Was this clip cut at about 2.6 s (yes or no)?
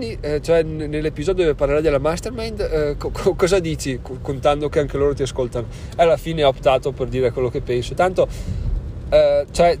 no